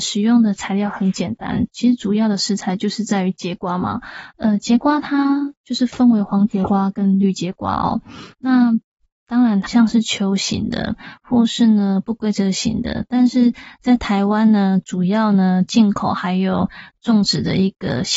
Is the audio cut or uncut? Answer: cut